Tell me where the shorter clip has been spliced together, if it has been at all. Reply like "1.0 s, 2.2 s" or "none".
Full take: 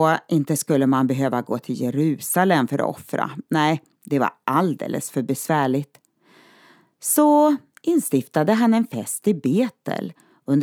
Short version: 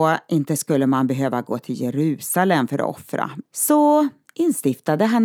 3.4 s